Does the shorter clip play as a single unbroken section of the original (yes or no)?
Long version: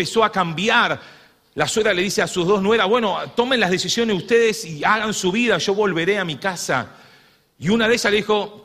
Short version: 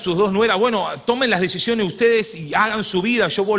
yes